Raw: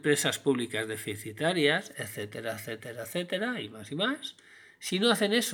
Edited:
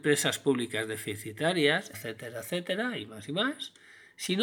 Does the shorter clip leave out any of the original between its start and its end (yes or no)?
yes